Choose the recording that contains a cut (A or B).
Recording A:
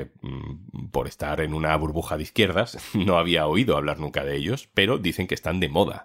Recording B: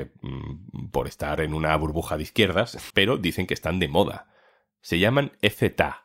B